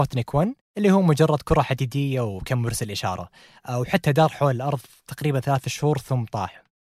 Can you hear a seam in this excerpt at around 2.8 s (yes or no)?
no